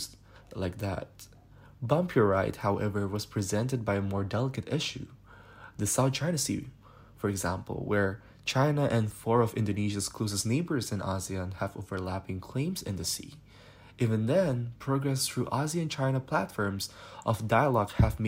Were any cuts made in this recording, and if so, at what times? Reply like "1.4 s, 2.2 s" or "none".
none